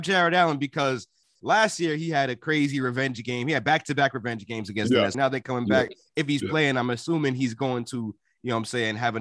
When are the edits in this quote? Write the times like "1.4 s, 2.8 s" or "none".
5.1 s